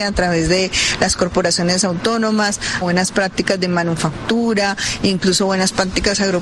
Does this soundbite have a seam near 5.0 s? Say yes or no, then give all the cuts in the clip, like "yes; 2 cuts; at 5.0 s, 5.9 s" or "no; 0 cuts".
no; 1 cut; at 2.8 s